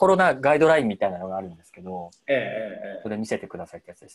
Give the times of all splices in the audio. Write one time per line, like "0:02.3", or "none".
none